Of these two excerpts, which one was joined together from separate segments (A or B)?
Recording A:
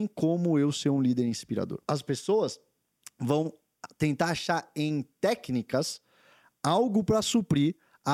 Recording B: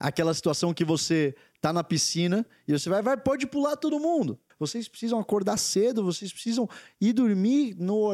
B